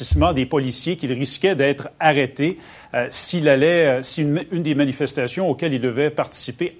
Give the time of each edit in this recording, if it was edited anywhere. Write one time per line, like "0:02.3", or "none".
none